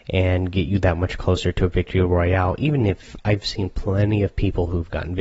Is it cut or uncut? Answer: uncut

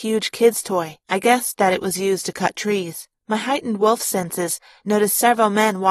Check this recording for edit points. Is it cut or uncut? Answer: cut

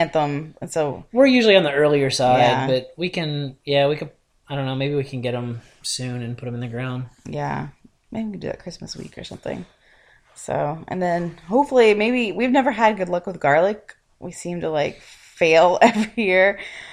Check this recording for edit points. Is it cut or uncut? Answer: uncut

